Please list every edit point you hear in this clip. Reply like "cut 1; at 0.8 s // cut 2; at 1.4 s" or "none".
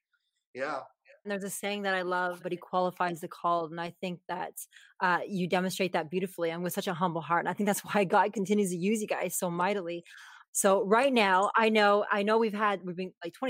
cut 1; at 1.2 s // cut 2; at 2.4 s // cut 3; at 10.4 s